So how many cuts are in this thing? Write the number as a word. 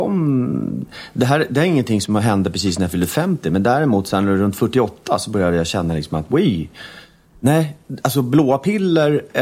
zero